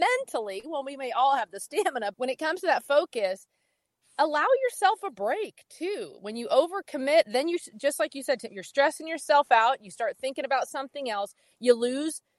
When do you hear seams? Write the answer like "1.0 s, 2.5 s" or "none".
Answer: 2.1 s